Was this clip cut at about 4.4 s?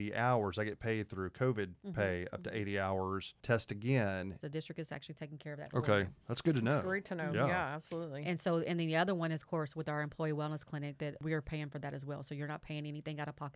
yes; 1 cut; at 4.4 s

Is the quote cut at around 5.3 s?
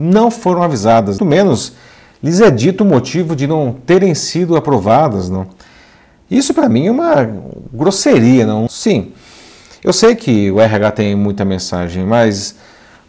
no; 2 cuts; at 1.2 s, 8.7 s

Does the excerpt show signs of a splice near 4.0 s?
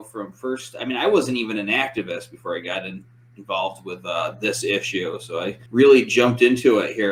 no; 1 cut; at 5.7 s

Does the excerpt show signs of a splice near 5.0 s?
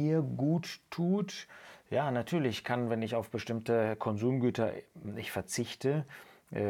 yes; 1 cut; at 5.0 s

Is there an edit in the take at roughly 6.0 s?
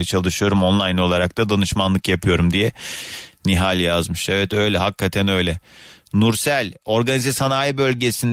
no; 0 cuts

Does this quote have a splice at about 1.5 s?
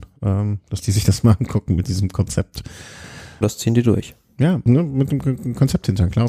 no; 2 cuts; at 3.4 s, 4.7 s

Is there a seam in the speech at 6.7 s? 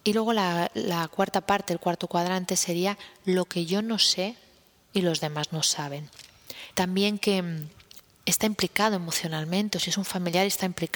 yes; 1 cut; at 6.7 s

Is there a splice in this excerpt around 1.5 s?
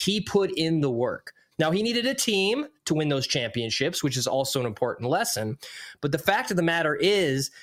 yes; 1 cut; at 1.5 s

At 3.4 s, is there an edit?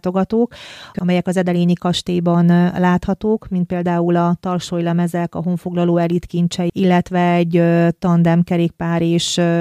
no; 2 cuts; at 0.9 s, 6.7 s

